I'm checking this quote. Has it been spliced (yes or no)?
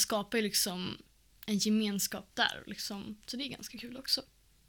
no